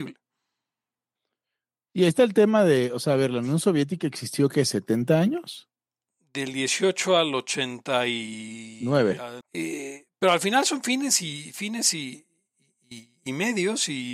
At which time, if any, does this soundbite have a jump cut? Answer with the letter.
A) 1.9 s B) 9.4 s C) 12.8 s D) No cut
B